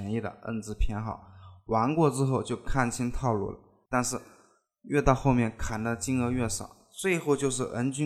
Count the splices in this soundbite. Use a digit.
1